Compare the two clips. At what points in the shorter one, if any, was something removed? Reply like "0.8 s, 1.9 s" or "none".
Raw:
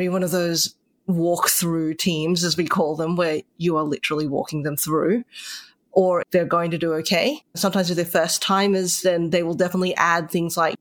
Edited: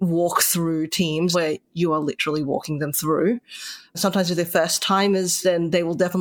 1.3 s, 3.9 s